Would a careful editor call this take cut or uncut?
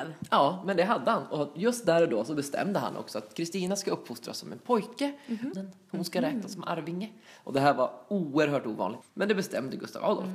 cut